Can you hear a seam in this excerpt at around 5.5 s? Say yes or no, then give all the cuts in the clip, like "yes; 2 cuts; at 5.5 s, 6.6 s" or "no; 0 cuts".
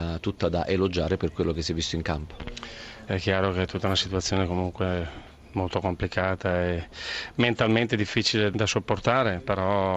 no; 2 cuts; at 3.1 s, 8.5 s